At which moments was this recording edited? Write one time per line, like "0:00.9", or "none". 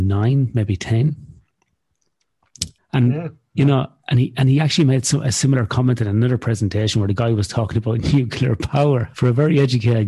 0:02.8
0:09.1